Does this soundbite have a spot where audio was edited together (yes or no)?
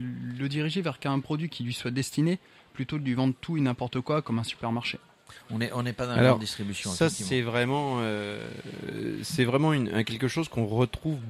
no